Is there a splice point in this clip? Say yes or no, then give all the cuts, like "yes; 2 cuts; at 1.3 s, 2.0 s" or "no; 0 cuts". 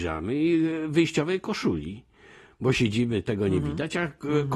no; 0 cuts